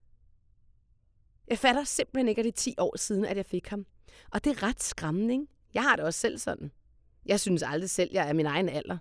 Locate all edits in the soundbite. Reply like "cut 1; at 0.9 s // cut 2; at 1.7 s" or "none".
cut 1; at 5.6 s